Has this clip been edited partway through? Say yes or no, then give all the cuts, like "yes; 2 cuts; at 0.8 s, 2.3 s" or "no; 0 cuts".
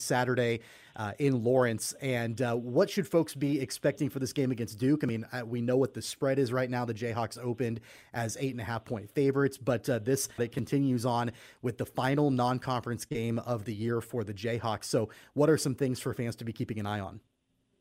yes; 1 cut; at 10.4 s